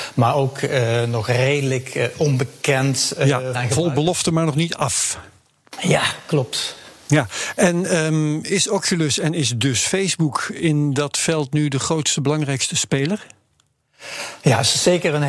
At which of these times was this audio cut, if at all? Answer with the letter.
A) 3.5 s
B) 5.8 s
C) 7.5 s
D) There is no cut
A